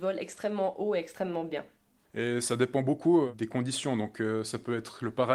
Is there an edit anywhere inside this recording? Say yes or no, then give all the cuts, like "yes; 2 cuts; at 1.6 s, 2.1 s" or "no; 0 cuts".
yes; 1 cut; at 2.0 s